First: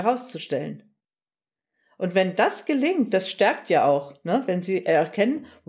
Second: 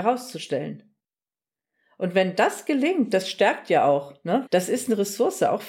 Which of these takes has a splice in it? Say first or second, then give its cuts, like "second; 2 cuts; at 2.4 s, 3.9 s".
second; 1 cut; at 4.5 s